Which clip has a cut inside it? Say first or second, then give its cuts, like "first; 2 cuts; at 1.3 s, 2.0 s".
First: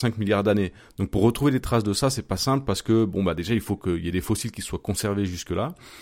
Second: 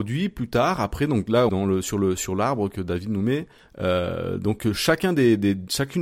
second; 1 cut; at 1.5 s